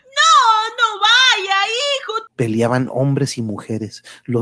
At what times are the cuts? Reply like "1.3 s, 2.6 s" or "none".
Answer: 2.3 s

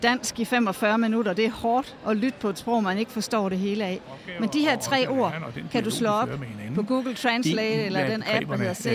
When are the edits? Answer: none

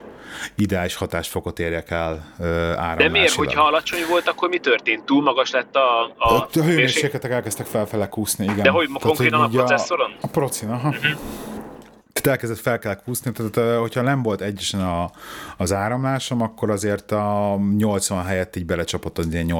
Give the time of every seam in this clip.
none

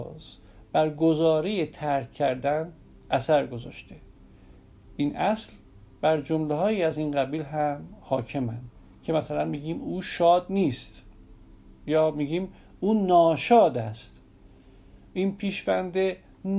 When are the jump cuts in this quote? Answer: none

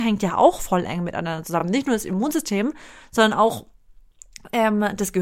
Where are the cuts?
none

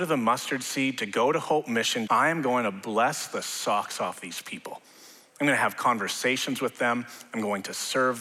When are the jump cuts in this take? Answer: 2.1 s

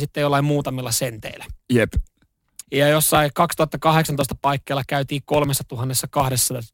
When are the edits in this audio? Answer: 2.6 s

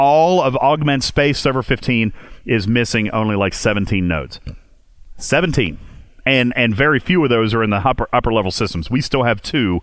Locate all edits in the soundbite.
none

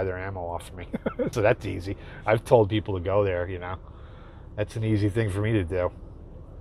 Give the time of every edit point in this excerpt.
1.3 s

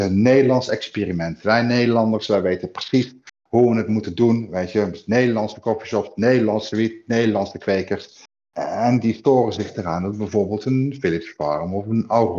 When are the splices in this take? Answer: none

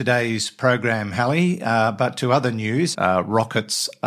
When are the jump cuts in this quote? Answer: 2.9 s

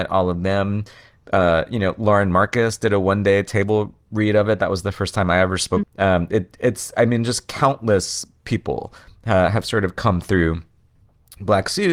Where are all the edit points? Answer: 5.8 s

